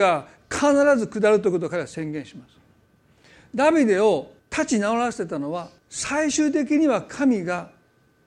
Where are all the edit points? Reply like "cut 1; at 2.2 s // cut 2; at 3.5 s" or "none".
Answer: cut 1; at 4.4 s // cut 2; at 5.8 s